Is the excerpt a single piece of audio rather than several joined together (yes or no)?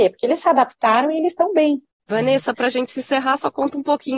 no